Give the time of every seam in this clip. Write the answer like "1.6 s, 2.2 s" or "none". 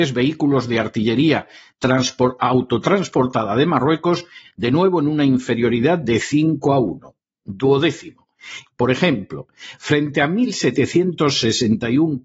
4.4 s, 8.7 s